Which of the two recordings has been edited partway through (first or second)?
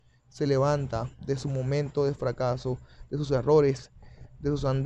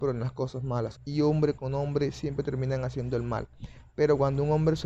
second